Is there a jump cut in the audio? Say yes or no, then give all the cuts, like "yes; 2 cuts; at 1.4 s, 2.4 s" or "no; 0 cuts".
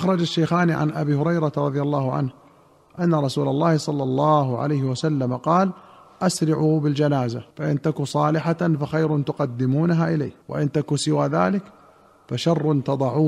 yes; 2 cuts; at 7.5 s, 10.4 s